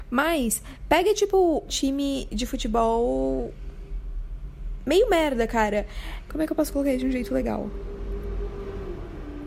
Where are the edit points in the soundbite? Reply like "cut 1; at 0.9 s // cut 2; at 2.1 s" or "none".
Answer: cut 1; at 1.7 s // cut 2; at 6.3 s